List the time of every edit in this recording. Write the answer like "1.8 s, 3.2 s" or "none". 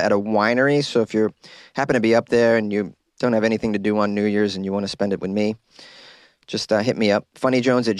none